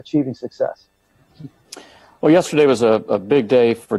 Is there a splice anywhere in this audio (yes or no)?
no